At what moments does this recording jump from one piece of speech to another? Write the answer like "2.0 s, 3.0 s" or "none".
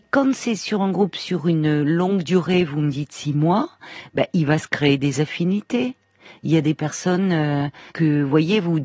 7.9 s